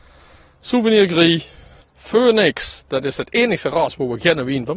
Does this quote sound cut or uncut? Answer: cut